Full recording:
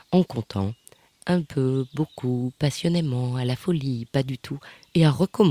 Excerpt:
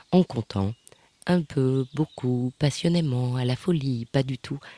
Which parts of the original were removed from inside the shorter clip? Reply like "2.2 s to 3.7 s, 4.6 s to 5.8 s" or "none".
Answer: none